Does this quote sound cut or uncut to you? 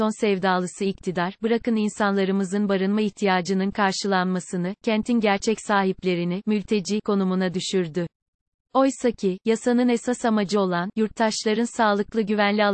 uncut